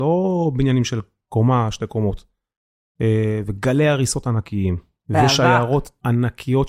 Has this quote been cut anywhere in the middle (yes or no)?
no